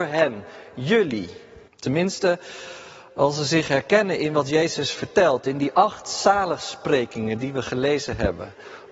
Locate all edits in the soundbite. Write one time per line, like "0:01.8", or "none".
0:01.7